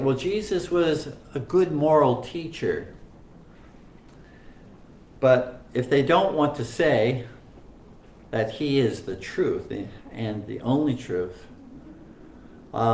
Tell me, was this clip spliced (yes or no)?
no